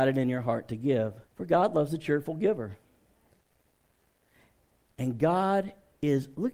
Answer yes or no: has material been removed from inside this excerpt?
yes